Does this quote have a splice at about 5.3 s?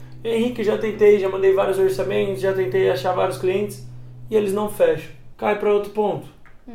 yes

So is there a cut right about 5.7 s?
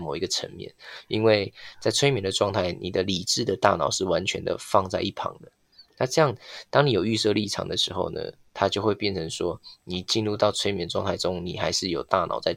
no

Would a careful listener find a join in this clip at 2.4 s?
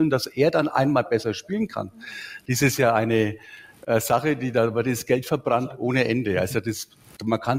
no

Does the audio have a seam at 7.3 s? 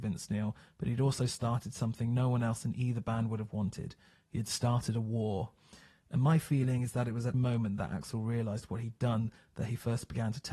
yes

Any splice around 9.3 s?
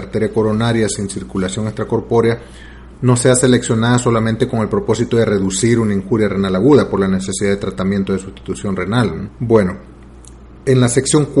yes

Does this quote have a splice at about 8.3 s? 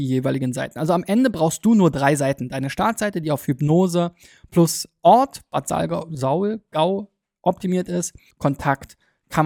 yes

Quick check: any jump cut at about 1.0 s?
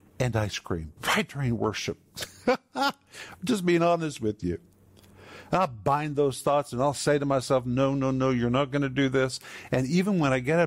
yes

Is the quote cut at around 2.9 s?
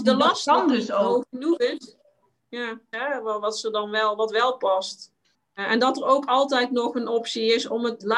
yes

